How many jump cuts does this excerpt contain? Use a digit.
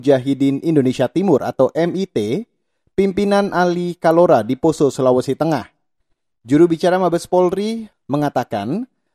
1